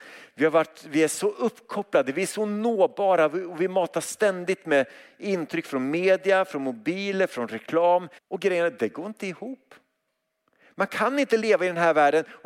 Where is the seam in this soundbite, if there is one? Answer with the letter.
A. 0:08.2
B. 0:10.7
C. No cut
A